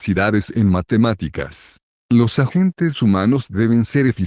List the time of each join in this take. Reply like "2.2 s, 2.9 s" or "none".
2.0 s